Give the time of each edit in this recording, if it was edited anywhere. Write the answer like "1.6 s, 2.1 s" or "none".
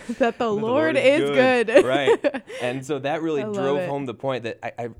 none

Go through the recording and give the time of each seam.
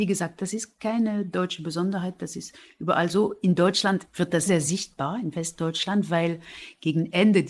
4.5 s

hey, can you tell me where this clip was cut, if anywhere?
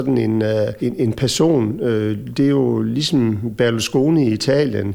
none

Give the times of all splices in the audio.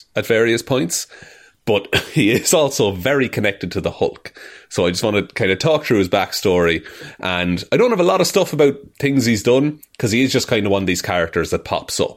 none

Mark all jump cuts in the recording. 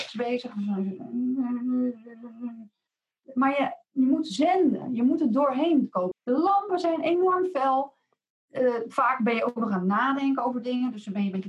6.1 s, 8.3 s

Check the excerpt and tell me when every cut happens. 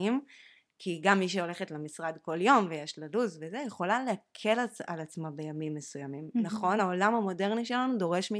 none

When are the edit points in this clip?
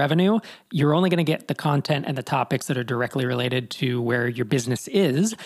none

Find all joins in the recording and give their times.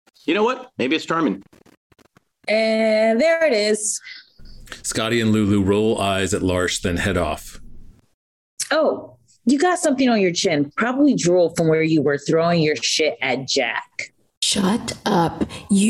none

